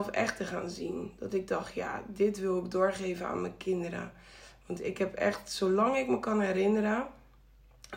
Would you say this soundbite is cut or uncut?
uncut